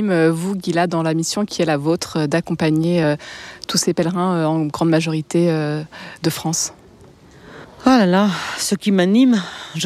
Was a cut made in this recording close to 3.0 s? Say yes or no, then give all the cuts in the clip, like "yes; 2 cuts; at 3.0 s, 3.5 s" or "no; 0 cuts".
no; 0 cuts